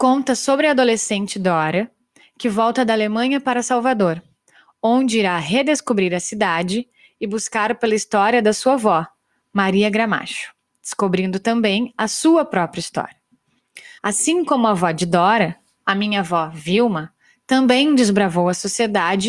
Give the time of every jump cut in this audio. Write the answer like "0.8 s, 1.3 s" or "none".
14.0 s